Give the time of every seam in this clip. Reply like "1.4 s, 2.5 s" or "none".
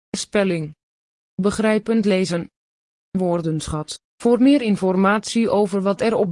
4.1 s